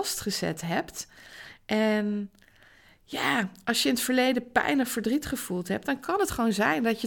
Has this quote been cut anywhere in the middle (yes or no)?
no